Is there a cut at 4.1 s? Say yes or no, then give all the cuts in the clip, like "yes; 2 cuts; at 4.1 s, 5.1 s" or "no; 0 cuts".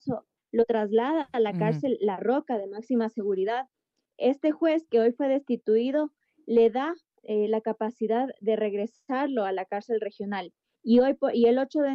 no; 0 cuts